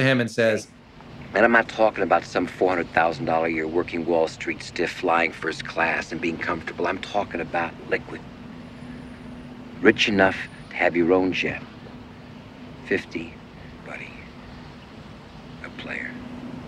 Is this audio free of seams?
no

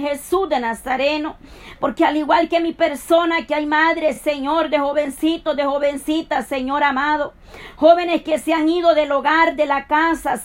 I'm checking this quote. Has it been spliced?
no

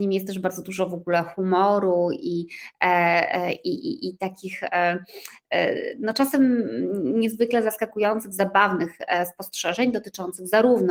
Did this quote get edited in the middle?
no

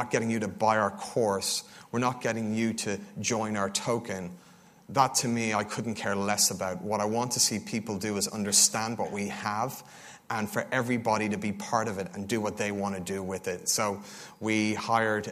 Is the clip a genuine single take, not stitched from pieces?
yes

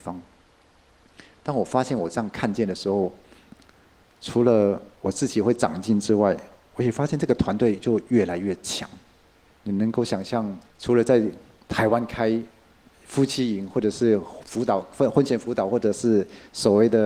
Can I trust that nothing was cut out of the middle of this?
no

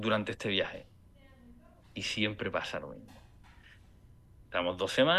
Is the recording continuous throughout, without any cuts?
no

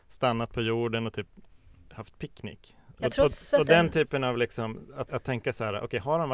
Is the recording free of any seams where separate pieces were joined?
no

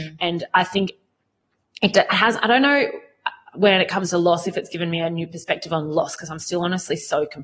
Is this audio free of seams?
yes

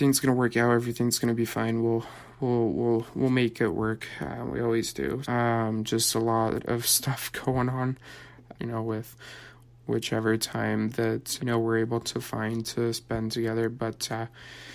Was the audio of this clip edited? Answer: yes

